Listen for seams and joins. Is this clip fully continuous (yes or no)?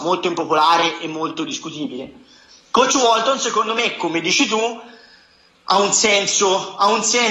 yes